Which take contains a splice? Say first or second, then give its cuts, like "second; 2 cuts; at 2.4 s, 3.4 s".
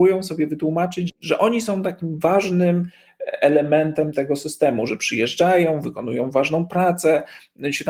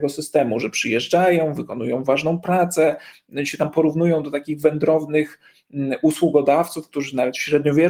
first; 1 cut; at 1.1 s